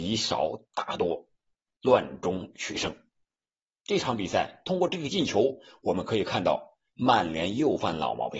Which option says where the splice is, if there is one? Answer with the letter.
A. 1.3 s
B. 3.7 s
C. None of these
C